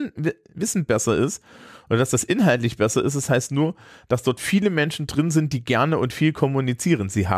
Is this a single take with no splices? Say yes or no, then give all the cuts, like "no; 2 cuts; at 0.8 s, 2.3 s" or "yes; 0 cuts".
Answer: yes; 0 cuts